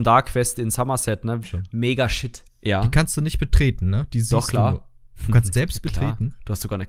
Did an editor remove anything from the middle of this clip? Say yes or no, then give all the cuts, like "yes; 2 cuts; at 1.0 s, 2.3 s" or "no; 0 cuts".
yes; 3 cuts; at 1.4 s, 2.5 s, 5.5 s